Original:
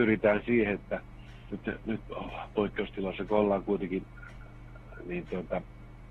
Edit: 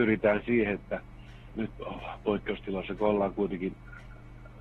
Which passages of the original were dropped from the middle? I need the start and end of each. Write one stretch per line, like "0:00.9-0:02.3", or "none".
0:01.5-0:01.8